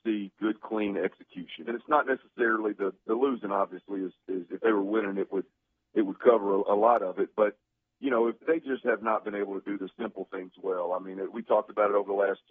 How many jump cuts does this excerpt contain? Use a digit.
2